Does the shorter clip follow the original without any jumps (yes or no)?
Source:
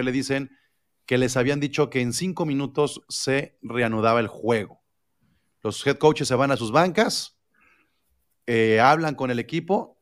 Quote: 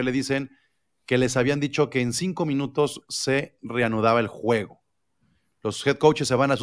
yes